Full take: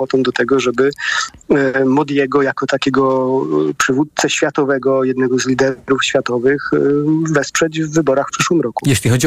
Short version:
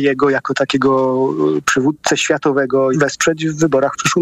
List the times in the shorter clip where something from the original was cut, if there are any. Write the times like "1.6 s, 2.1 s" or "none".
2.9 s